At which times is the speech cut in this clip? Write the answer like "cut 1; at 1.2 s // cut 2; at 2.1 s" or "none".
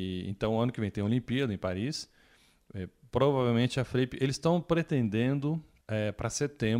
cut 1; at 5.8 s